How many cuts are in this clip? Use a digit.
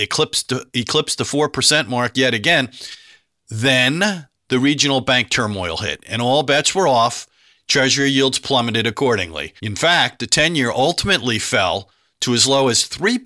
1